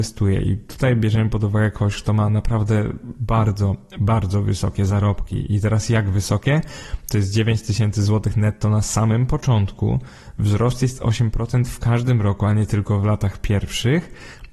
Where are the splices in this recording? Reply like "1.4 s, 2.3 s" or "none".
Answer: none